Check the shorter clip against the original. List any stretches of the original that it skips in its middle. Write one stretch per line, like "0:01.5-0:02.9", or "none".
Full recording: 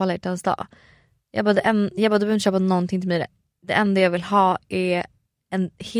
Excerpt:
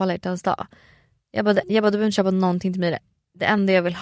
0:01.6-0:01.9